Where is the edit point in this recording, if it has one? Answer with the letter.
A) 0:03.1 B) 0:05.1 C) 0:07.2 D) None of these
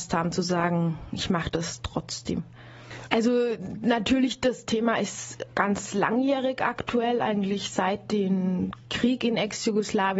A